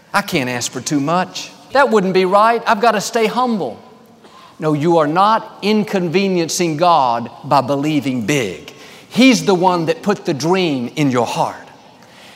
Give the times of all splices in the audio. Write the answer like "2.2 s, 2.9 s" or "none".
1.7 s